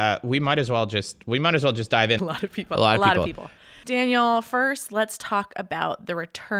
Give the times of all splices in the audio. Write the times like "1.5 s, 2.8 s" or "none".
2.2 s

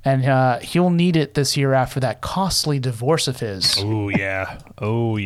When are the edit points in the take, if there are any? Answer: none

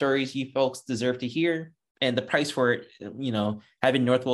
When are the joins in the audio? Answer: 1.9 s

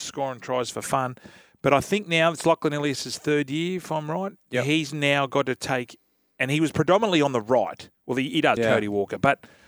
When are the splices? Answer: 8.6 s

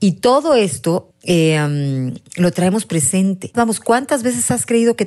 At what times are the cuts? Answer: 1.1 s, 3.5 s

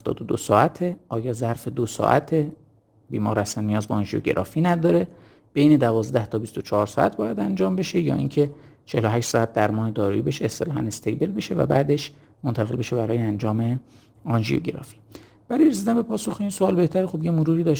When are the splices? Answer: none

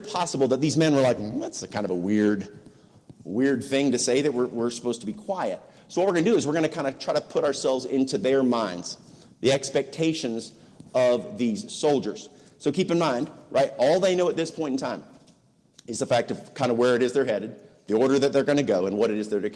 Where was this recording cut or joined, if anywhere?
none

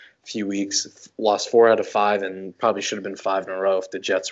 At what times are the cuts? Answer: none

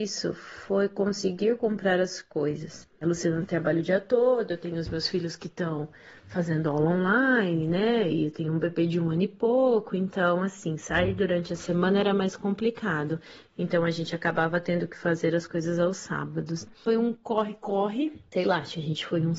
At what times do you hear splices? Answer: none

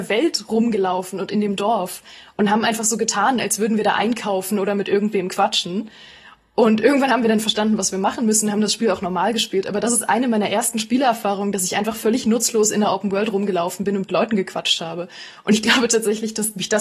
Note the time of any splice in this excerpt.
none

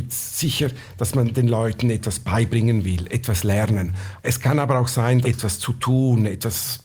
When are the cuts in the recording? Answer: 4.2 s, 5.2 s

